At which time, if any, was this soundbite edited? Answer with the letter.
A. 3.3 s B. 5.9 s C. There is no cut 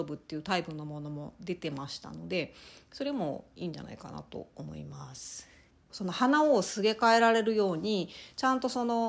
B